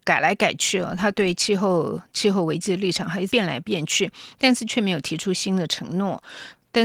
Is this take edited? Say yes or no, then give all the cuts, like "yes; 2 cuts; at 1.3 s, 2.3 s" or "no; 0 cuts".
yes; 1 cut; at 3.3 s